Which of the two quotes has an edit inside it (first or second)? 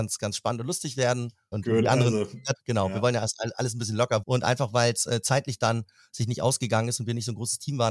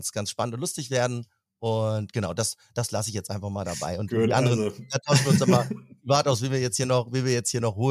first